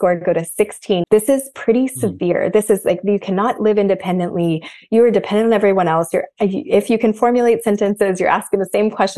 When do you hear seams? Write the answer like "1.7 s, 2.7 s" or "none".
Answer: 1.0 s